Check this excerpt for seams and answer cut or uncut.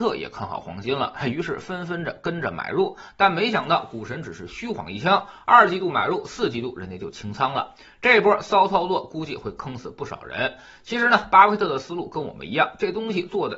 uncut